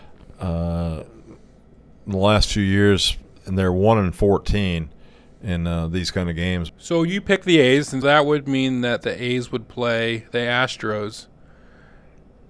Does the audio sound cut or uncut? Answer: cut